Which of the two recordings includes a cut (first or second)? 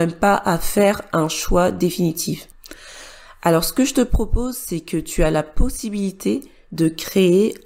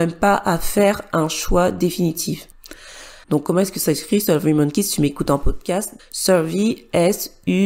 second